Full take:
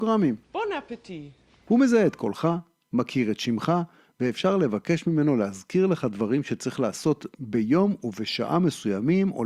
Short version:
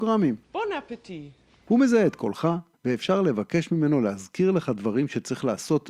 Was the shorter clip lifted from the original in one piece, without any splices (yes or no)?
no